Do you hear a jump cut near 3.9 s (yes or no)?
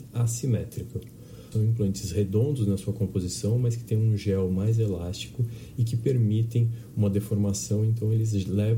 no